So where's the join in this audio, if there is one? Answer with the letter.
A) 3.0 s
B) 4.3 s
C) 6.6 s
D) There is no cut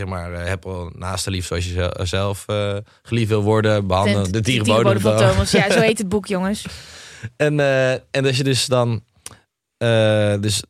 B